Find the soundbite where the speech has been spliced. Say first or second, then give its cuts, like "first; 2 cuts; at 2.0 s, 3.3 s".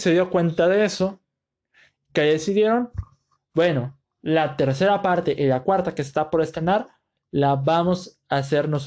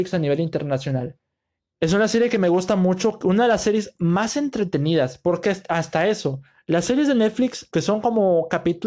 second; 2 cuts; at 1.7 s, 7.7 s